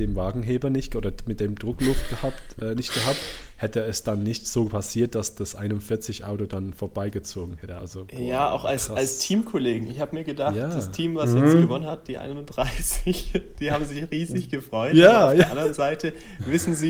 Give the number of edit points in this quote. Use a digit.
1